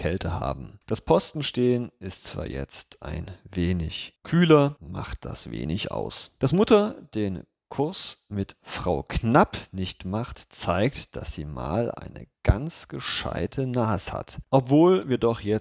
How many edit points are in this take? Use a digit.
2